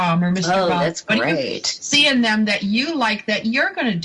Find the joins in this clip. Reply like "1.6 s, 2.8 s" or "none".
none

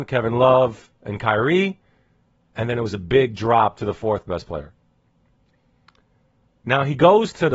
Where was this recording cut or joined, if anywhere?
none

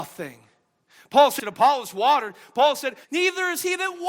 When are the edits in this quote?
1.4 s, 3.0 s

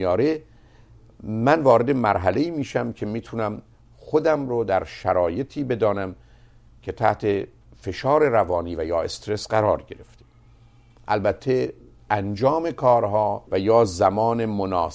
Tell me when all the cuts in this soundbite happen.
13.5 s

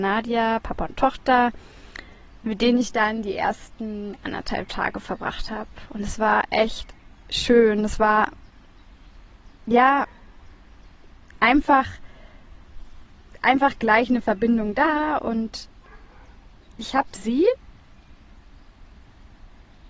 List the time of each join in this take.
none

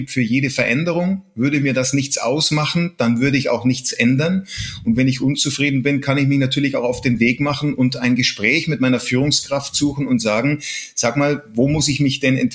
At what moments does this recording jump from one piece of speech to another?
none

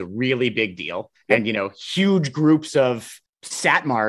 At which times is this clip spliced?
none

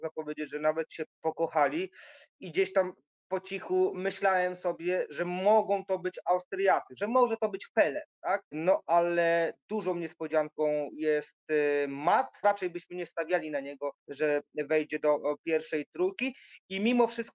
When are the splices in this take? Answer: 8.5 s, 12.4 s, 14.0 s

